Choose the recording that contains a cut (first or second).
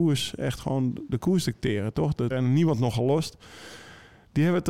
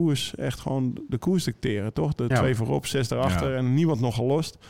first